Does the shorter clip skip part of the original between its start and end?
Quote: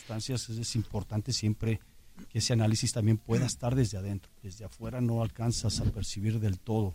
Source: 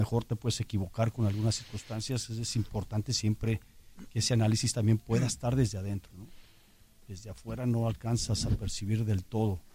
yes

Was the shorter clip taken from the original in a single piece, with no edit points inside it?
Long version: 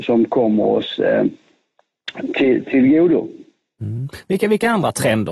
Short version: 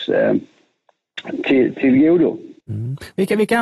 no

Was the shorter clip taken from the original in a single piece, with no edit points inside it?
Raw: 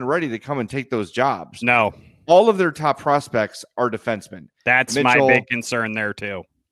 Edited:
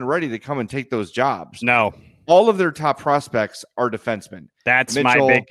yes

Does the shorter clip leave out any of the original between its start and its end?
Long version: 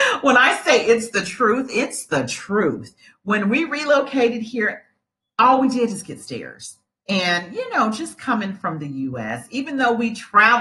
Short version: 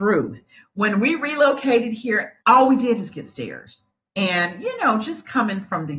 yes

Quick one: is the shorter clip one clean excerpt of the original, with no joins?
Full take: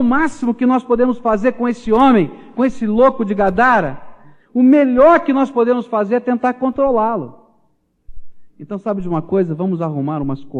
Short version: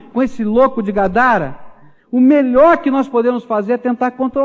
yes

